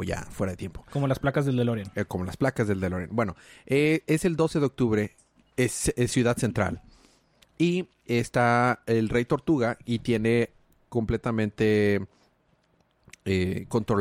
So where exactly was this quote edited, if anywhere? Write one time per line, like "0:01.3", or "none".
none